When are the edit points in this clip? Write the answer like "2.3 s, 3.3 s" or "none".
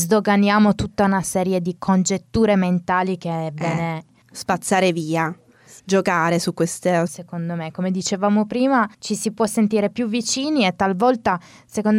5.8 s, 7.1 s, 8.9 s